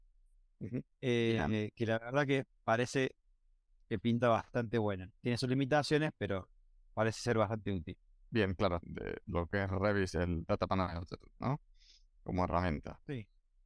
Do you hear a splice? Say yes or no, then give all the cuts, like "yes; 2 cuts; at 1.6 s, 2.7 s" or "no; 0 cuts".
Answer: yes; 2 cuts; at 8.8 s, 11.4 s